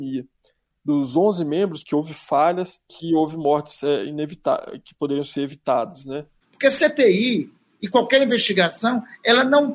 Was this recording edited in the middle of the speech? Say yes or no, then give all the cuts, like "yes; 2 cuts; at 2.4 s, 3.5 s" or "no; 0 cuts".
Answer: yes; 2 cuts; at 1.8 s, 6.4 s